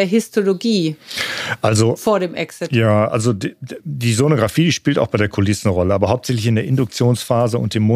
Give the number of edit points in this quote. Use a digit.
0